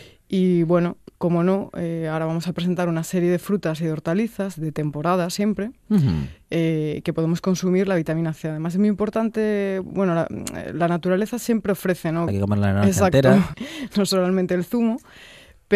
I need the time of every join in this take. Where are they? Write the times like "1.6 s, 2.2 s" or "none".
12.3 s, 13.5 s